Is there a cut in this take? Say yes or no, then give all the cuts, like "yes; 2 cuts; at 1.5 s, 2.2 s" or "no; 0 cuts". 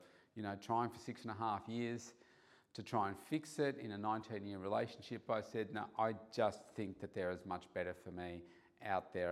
no; 0 cuts